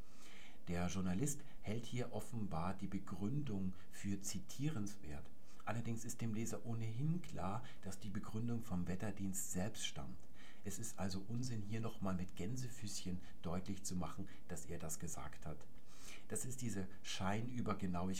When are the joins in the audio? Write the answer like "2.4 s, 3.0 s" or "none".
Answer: none